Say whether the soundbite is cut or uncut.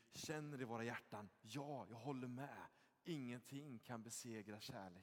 uncut